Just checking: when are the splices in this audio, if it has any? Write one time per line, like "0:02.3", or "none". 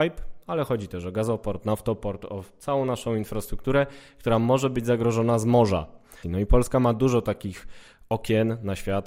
0:06.2